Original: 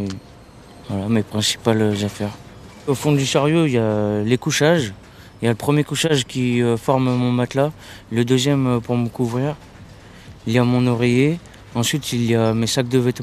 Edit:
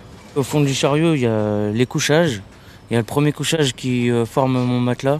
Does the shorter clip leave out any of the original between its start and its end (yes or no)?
no